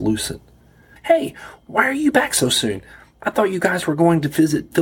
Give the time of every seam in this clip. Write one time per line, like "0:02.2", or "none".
0:01.0